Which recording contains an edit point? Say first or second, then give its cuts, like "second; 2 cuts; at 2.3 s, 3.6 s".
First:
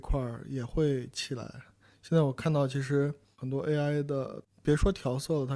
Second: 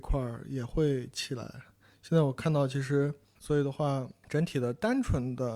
second; 1 cut; at 3.3 s